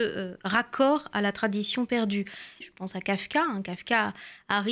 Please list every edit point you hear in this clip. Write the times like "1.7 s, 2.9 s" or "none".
2.6 s